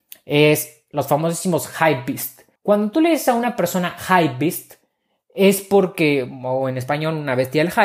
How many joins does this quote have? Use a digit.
1